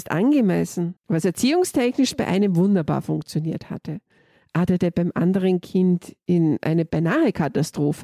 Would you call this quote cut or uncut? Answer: cut